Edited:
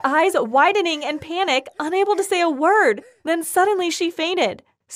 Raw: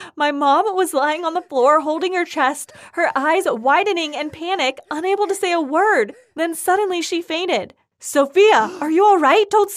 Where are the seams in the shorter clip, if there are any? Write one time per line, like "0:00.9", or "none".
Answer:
none